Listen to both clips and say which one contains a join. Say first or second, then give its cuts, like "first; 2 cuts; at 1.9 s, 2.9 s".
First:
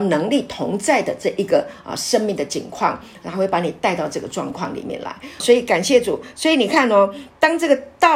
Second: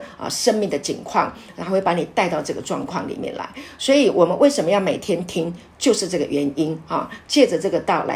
first; 1 cut; at 5.4 s